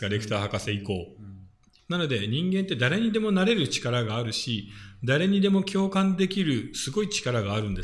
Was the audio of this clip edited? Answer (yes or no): yes